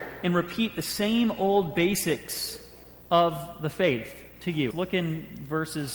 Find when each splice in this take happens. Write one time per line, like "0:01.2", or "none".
0:04.7

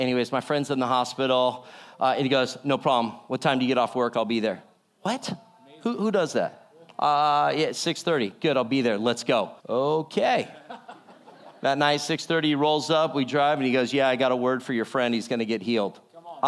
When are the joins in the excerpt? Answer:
0:09.6

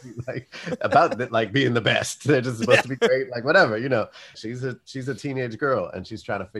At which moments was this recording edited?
0:04.3

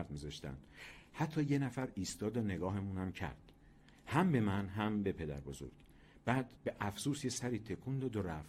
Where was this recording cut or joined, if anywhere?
0:06.6

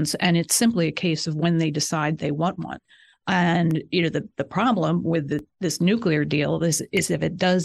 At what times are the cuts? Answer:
none

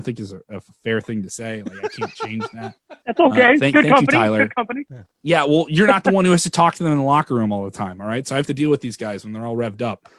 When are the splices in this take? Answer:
none

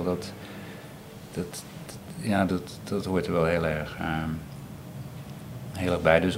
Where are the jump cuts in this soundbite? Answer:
none

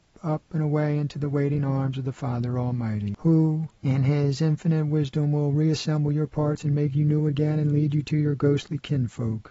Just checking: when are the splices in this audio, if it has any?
none

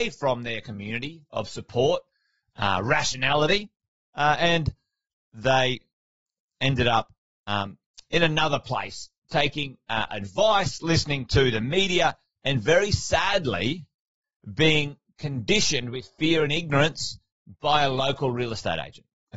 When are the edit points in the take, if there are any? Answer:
none

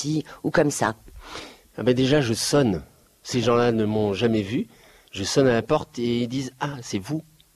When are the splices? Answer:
none

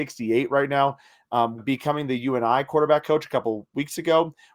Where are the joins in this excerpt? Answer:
0:01.6

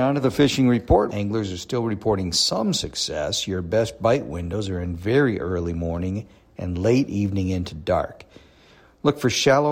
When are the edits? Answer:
0:01.1

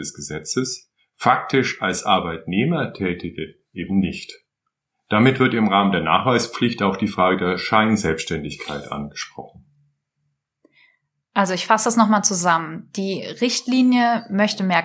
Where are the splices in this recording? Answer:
none

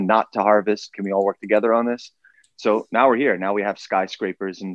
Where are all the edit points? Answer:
none

